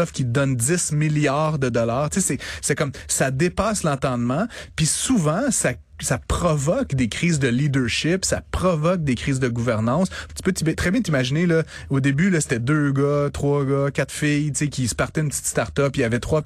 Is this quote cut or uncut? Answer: cut